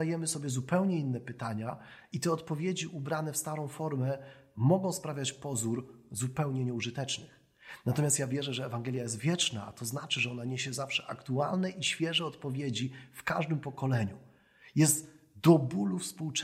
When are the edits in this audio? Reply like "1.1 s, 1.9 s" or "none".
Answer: none